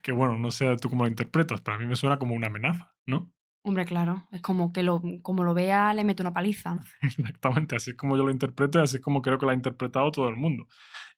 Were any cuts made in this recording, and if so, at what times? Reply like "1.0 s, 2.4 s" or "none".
none